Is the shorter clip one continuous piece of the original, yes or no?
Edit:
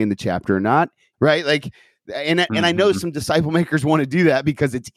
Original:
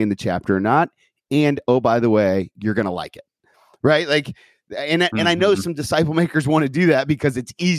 no